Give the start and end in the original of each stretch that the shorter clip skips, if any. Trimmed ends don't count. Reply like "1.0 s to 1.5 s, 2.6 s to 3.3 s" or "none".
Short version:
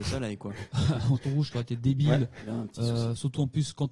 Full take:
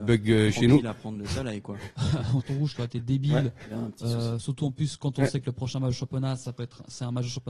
none

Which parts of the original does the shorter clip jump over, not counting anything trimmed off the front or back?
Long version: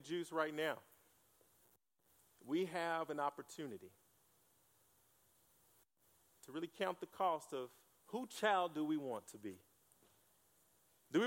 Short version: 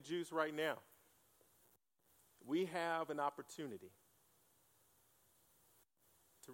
none

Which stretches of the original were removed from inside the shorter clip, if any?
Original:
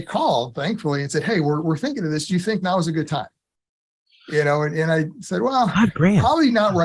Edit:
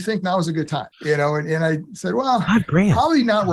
3.3 s to 4.2 s

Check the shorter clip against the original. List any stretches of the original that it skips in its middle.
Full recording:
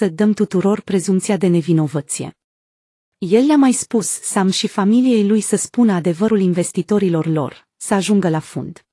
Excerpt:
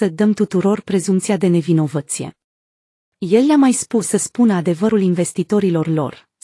4.0 s to 5.4 s

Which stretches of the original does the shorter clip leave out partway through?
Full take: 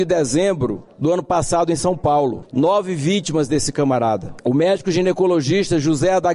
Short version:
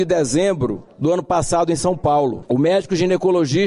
2.5 s to 4.4 s

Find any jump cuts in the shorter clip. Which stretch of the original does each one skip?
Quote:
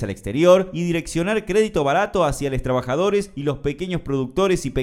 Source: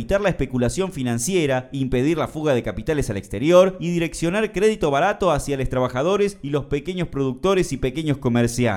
none

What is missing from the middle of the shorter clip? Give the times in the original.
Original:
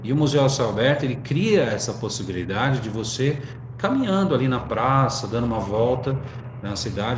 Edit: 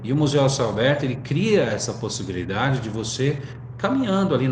none

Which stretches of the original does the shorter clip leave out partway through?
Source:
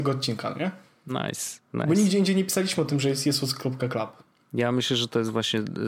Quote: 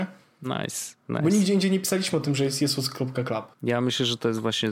4.2 s to 4.4 s

